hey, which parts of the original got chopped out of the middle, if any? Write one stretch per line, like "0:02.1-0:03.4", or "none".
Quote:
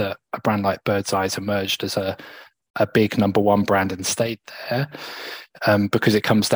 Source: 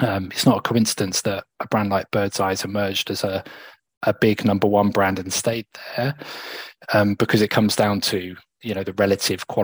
none